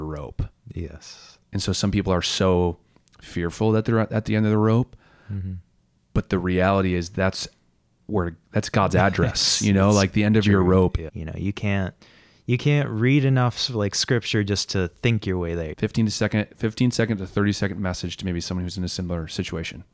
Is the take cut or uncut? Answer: cut